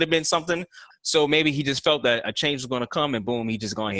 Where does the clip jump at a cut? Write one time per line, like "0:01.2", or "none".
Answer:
0:00.9